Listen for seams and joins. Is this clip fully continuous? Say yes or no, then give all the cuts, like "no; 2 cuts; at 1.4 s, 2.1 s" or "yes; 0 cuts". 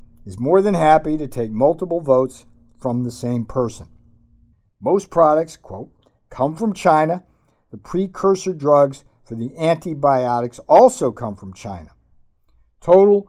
no; 1 cut; at 4.7 s